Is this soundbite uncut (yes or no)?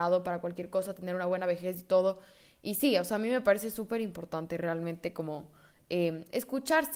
yes